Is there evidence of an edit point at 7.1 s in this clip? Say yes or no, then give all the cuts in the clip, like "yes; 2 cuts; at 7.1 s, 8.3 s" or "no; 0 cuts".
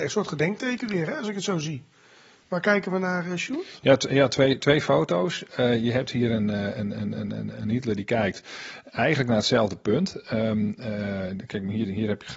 no; 0 cuts